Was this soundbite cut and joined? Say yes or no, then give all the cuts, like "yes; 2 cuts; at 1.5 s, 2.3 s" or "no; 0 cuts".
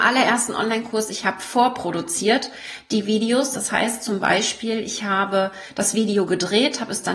no; 0 cuts